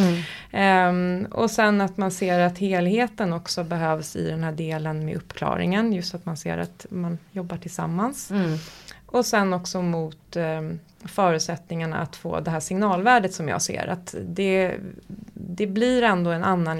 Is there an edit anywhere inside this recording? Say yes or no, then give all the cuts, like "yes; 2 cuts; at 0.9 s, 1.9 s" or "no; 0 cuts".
no; 0 cuts